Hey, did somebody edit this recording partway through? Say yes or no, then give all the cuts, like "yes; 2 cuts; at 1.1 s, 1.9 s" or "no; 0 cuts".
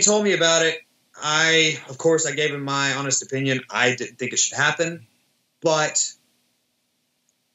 no; 0 cuts